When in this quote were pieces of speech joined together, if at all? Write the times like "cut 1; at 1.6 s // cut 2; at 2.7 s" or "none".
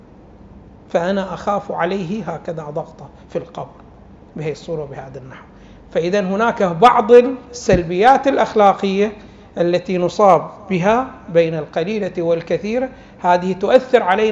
none